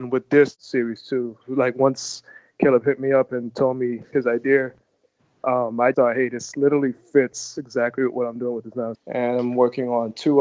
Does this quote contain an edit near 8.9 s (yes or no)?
yes